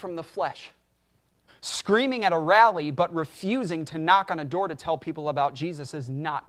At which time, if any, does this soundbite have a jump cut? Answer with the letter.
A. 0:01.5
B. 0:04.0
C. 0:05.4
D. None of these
A